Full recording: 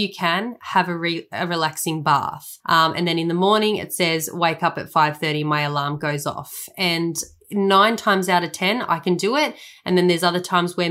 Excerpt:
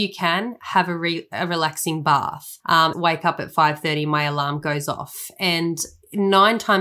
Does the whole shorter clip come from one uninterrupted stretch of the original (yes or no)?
no